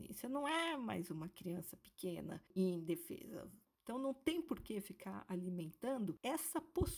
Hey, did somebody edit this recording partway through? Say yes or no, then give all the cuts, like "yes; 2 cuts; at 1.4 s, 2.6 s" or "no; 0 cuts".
no; 0 cuts